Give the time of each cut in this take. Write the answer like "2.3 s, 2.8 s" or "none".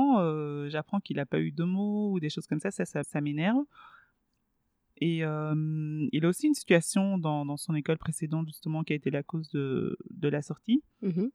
3.0 s

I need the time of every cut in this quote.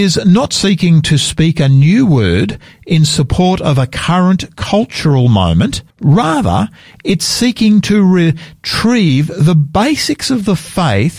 5.9 s

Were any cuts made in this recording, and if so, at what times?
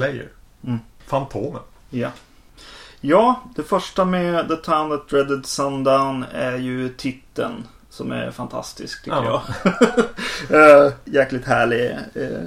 none

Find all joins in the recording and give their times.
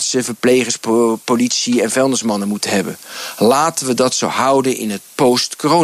none

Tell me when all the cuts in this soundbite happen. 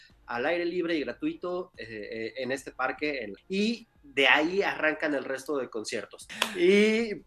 3.4 s, 6.3 s

